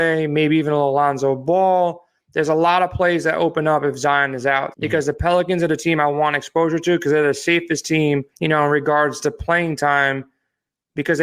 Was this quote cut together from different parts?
yes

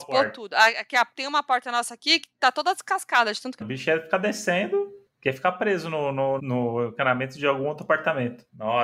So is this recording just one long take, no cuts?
no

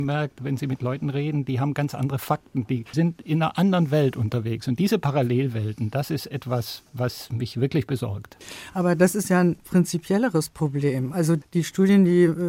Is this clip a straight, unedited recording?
yes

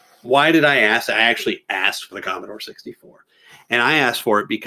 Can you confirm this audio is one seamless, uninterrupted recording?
yes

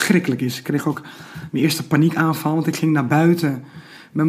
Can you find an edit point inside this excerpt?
no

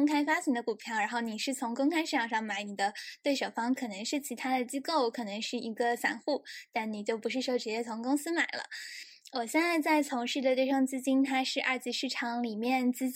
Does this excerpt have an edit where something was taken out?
no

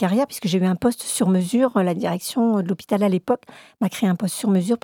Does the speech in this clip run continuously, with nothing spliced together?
yes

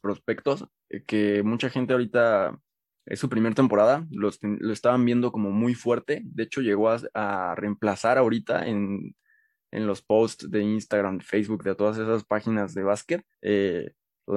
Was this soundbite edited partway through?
yes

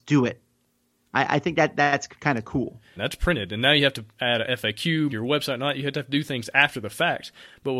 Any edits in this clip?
yes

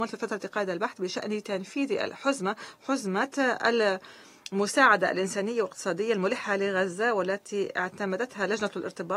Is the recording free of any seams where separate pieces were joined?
yes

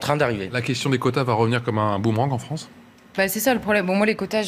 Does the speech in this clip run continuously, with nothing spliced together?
yes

